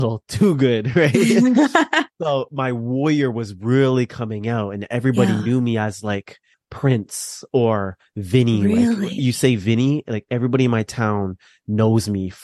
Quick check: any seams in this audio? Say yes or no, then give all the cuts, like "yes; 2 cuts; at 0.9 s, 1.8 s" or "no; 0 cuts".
no; 0 cuts